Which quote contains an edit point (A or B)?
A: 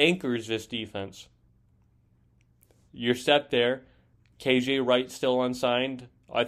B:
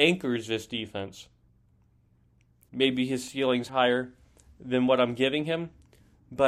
B